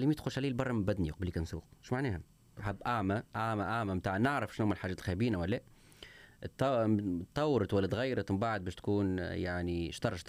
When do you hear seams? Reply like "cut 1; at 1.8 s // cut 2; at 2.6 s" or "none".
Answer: cut 1; at 2.6 s